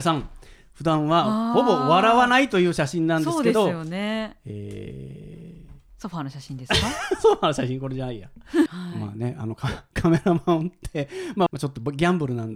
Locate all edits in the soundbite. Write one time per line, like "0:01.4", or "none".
0:08.7
0:11.5